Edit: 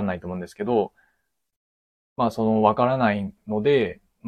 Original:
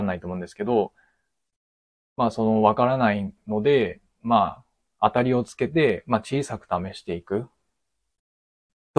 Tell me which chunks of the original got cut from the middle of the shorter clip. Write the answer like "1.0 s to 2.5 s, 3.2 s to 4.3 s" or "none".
none